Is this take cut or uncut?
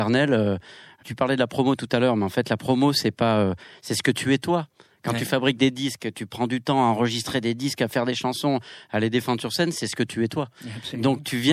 uncut